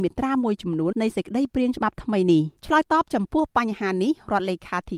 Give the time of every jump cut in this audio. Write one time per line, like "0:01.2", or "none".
0:00.9
0:02.6